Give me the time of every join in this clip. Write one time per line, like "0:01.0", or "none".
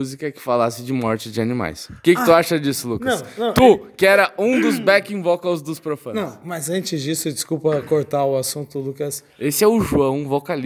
none